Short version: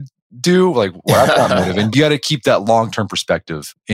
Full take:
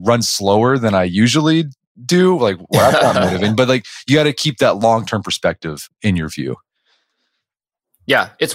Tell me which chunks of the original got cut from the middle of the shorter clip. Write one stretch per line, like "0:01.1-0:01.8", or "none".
0:03.6-0:04.0

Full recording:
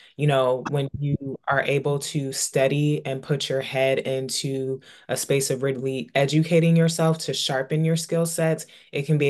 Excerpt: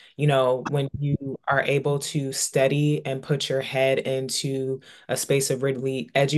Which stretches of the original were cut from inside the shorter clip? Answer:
none

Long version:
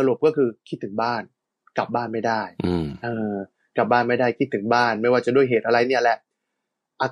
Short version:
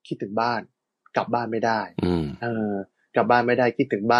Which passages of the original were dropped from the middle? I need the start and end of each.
none

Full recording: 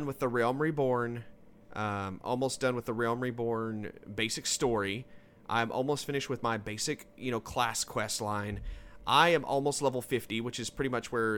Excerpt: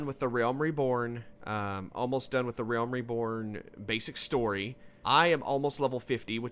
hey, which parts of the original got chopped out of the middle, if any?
0:01.4-0:01.6
0:05.3-0:09.0

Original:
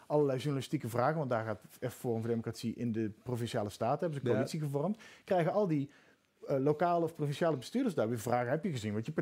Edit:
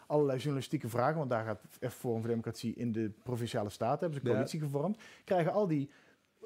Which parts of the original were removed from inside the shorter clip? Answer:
none

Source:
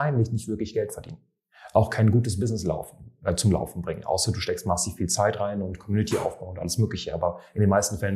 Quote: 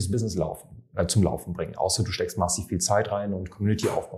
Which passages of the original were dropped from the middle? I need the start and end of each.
none

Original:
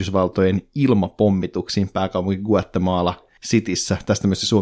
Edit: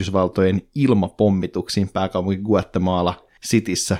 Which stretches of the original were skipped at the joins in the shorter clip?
none

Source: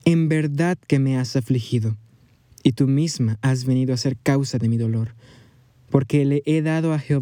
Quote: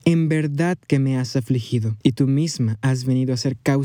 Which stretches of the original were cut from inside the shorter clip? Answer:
0:02.0-0:02.6

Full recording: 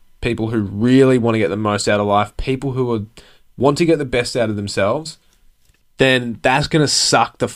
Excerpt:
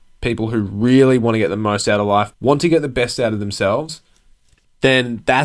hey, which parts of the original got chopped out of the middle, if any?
0:02.3-0:03.5

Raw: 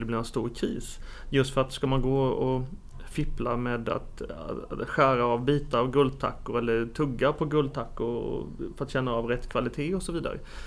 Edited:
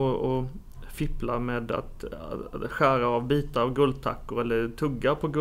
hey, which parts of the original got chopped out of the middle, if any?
none

